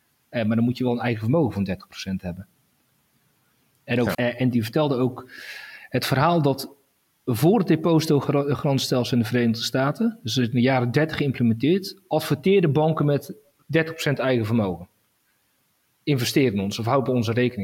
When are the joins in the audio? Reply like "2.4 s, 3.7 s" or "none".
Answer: 4.1 s